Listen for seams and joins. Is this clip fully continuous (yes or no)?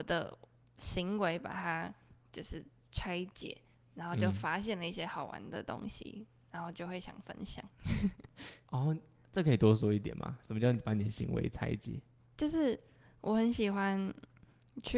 yes